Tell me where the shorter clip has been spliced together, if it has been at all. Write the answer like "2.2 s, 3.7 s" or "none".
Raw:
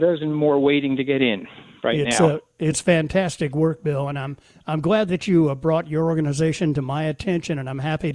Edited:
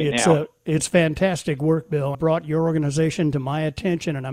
2.1 s